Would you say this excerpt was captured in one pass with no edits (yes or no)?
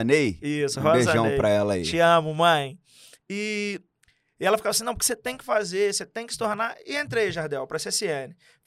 yes